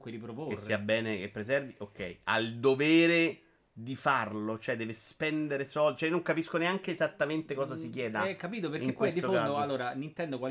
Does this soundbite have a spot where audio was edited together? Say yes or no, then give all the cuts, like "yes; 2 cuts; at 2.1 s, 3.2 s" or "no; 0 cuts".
no; 0 cuts